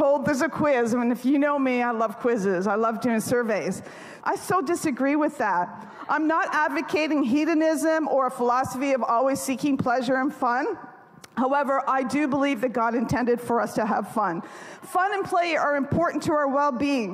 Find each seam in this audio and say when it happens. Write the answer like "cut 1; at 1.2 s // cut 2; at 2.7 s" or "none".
cut 1; at 4.2 s